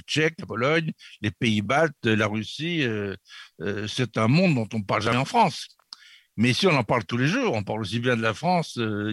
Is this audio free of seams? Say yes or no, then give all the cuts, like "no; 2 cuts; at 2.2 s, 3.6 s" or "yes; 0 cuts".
yes; 0 cuts